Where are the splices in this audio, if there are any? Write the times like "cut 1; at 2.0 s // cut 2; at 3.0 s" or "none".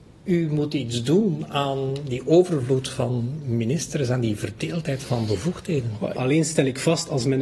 cut 1; at 6.1 s